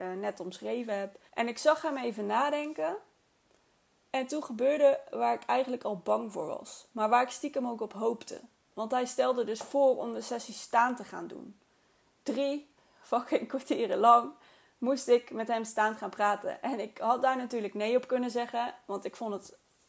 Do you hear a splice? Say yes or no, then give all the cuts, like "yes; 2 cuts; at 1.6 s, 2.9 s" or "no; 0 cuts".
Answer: yes; 1 cut; at 1.3 s